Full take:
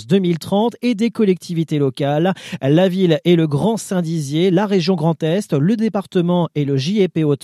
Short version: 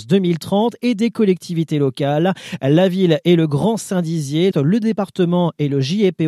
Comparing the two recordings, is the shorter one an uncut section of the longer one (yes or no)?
no